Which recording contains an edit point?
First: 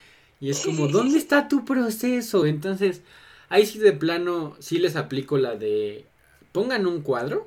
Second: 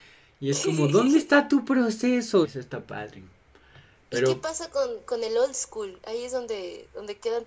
second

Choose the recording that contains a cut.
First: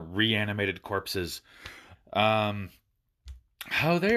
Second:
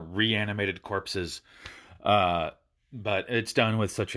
first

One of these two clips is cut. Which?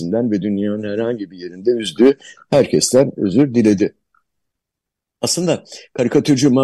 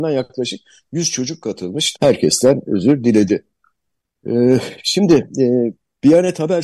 second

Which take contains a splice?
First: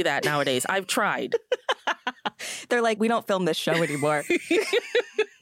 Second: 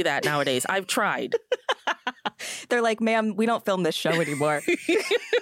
first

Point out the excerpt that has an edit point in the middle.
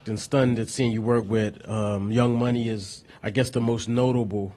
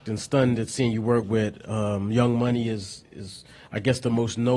first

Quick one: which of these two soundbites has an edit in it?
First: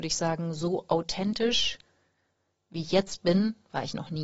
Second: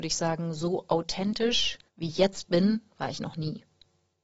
second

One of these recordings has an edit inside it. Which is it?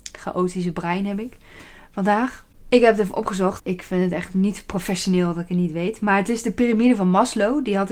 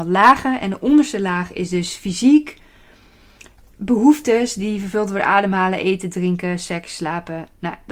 first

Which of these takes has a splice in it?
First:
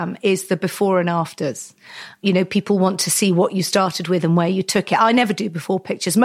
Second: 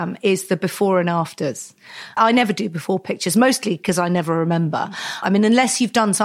second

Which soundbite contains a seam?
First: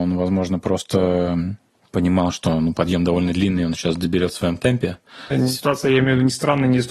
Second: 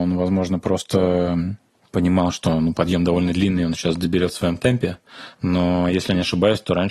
first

